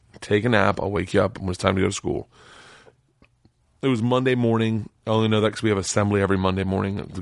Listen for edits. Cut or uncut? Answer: uncut